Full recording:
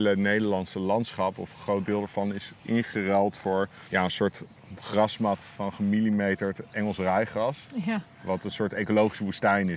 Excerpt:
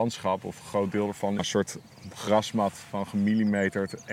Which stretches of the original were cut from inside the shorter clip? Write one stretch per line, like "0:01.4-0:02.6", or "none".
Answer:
0:02.3-0:04.0